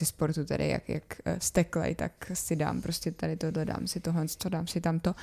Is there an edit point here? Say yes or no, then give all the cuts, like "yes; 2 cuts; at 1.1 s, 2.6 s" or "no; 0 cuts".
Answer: no; 0 cuts